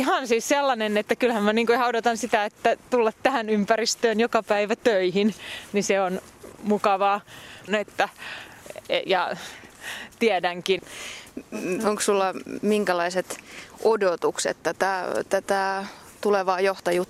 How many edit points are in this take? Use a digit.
2